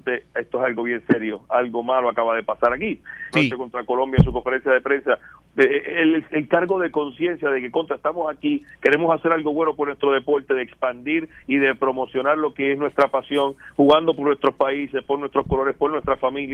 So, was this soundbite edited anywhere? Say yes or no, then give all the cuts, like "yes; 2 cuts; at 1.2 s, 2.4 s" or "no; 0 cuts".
yes; 1 cut; at 3.3 s